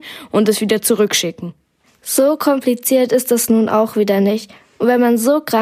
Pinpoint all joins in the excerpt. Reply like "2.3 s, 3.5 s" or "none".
none